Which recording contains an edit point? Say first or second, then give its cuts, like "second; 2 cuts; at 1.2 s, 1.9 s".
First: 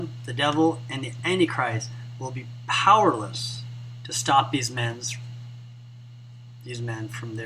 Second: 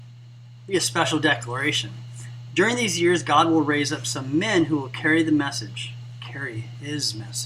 second; 1 cut; at 2.5 s